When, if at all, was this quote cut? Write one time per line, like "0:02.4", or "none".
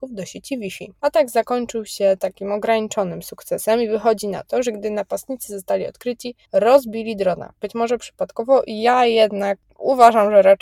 0:01.0
0:06.4

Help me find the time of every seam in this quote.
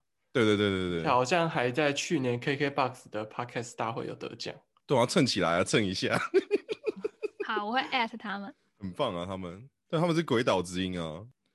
none

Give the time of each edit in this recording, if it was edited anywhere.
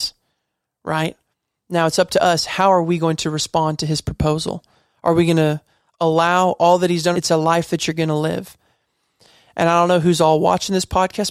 0:07.1

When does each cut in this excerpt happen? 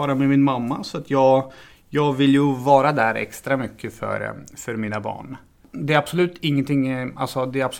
none

